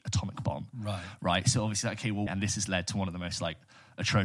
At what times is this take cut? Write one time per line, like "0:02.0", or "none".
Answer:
0:02.3